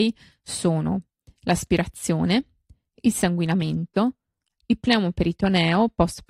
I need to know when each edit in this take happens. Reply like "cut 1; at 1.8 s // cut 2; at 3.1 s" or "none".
cut 1; at 4.6 s